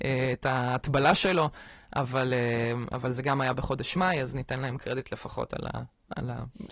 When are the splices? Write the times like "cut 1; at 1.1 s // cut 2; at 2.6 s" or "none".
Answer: none